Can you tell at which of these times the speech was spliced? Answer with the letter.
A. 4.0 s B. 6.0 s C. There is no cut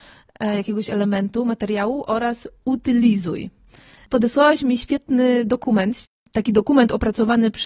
C